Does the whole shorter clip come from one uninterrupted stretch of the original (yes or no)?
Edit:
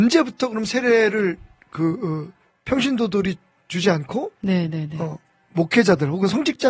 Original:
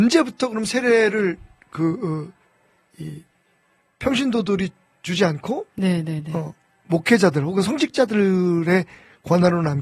no